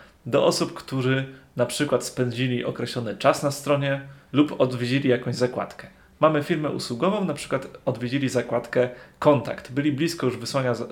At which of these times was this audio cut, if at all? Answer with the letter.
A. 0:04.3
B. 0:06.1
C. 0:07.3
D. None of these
A